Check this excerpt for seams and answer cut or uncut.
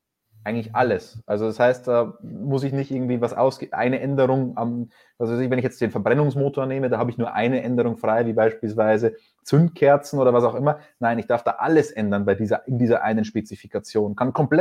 uncut